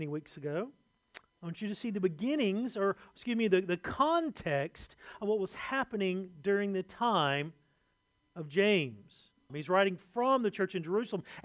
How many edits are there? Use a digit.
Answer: 2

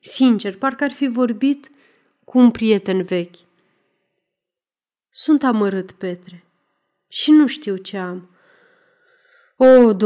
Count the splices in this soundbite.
0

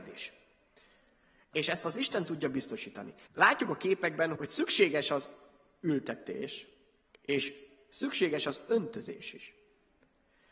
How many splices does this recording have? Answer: 2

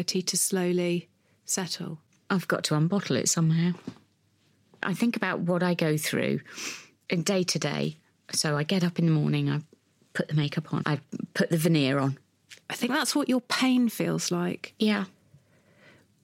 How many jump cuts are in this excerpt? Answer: 2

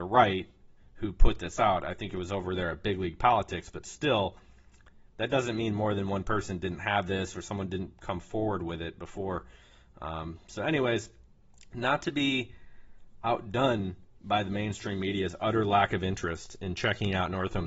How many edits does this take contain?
0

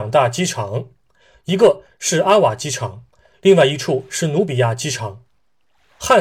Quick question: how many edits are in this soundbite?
0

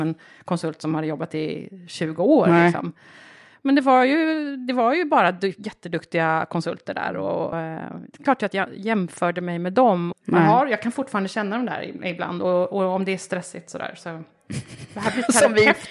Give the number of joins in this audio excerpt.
2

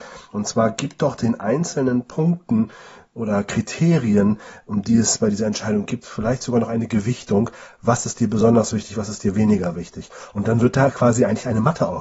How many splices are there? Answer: 0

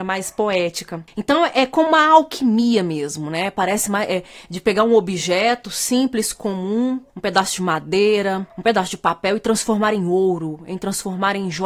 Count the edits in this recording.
1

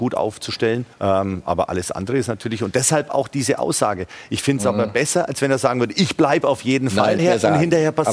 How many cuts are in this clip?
2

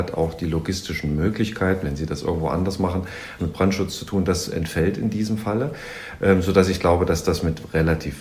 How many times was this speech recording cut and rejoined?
2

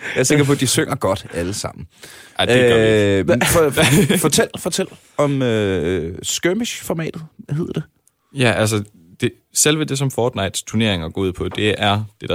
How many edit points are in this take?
0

